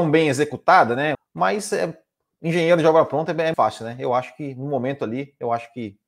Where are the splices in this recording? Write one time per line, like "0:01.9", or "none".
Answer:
0:01.1
0:03.5